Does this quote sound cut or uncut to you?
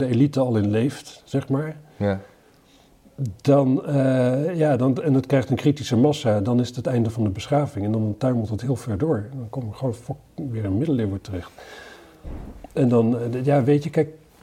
uncut